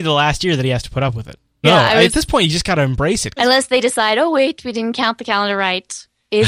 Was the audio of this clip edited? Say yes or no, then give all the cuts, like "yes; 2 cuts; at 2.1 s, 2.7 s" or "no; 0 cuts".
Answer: yes; 2 cuts; at 1.6 s, 3.4 s